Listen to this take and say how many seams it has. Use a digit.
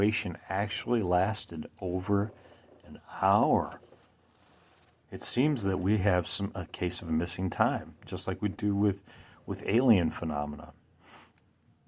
1